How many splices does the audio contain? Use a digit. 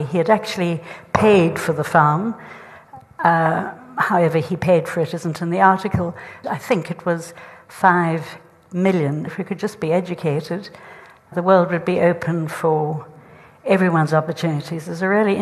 3